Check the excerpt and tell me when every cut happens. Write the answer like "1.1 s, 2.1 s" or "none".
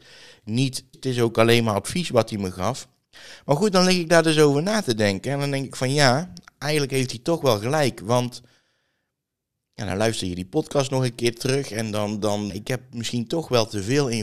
0.9 s, 12.5 s